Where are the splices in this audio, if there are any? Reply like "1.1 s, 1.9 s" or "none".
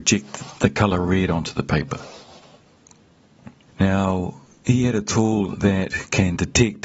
3.7 s